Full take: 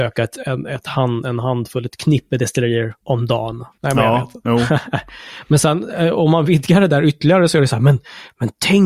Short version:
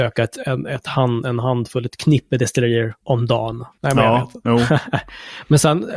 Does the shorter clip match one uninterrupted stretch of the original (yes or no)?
yes